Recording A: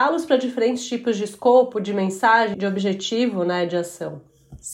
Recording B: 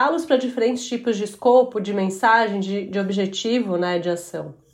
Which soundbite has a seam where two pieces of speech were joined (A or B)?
A